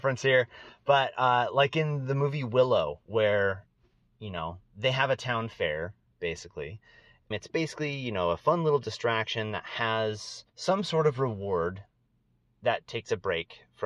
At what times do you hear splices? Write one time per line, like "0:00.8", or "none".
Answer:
0:07.3
0:10.5